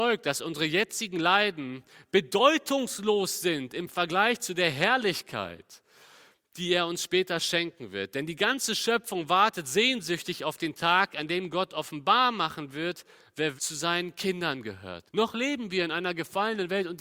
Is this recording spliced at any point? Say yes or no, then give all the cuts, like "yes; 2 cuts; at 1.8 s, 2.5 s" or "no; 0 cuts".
yes; 2 cuts; at 13.6 s, 15.1 s